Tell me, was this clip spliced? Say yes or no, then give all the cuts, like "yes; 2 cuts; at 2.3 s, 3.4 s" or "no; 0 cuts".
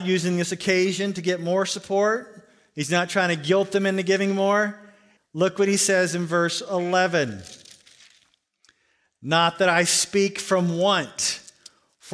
yes; 1 cut; at 5.2 s